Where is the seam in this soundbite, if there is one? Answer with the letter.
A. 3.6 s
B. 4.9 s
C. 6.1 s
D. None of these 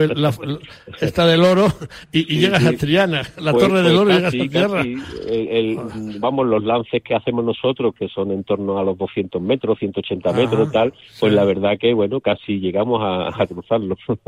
D